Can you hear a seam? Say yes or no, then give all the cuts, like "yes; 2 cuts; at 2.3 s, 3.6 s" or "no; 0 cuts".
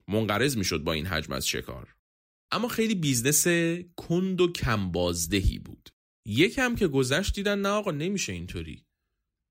yes; 2 cuts; at 2.4 s, 6.2 s